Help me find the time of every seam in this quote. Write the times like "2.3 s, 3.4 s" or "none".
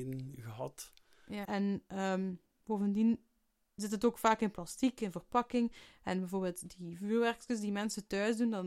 1.5 s